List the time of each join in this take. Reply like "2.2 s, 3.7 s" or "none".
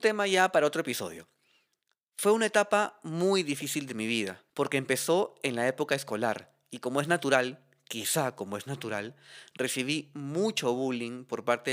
4.5 s